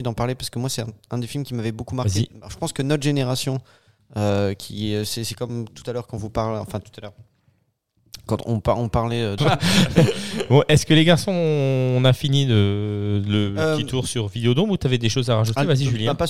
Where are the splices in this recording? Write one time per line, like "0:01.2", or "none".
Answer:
0:09.4